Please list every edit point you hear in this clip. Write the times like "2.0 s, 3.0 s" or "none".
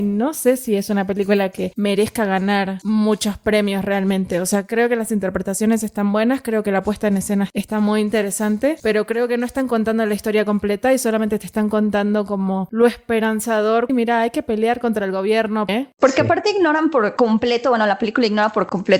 13.9 s, 15.7 s